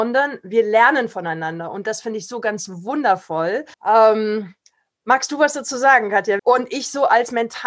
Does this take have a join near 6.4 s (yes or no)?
yes